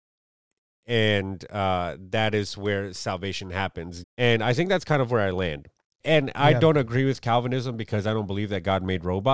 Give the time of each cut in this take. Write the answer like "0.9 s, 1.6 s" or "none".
4.0 s, 6.0 s